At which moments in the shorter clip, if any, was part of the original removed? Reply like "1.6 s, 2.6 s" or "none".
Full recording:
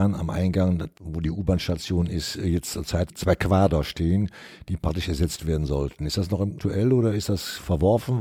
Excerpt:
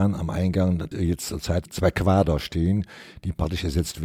0.9 s